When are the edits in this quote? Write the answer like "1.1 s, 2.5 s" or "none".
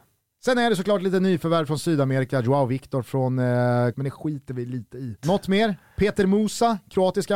3.9 s, 5.2 s